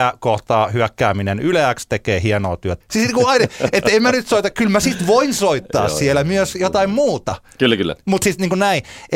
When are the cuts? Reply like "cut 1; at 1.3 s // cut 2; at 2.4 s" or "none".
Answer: cut 1; at 2.8 s